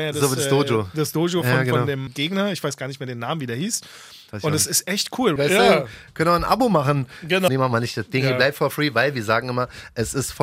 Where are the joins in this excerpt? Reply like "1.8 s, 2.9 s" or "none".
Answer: 2.1 s, 5.4 s, 7.5 s

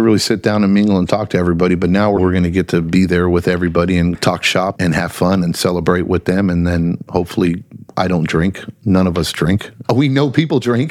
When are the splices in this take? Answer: 9.8 s

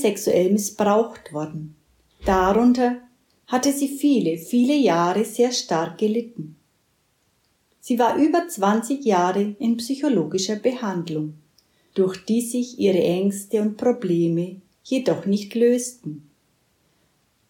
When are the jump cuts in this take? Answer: none

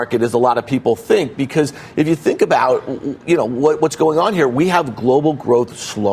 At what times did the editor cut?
none

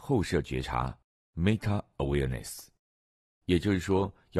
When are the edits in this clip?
3.4 s

